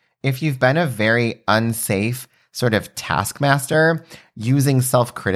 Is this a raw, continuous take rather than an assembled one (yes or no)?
yes